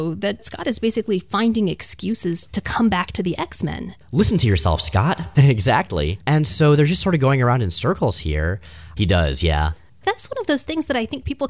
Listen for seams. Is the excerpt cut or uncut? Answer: cut